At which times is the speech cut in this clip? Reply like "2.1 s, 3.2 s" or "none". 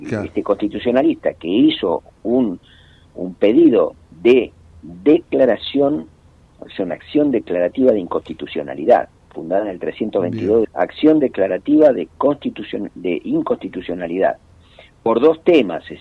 10.6 s